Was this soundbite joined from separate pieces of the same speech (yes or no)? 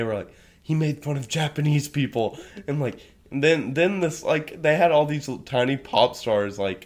no